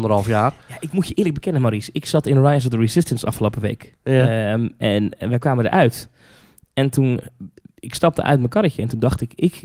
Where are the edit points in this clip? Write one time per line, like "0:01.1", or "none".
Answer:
none

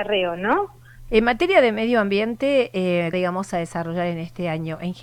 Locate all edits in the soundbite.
0:01.1
0:03.1

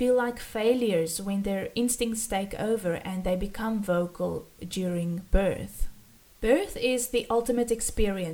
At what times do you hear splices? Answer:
none

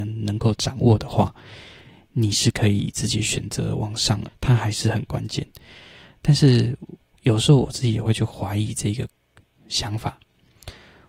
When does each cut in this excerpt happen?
0:04.2

